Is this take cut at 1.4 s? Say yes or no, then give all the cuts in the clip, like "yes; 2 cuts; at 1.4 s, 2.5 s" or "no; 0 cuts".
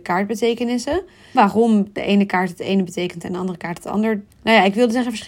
yes; 2 cuts; at 1.4 s, 4.3 s